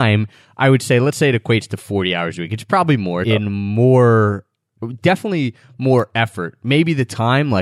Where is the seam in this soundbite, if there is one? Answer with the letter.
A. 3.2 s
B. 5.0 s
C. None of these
A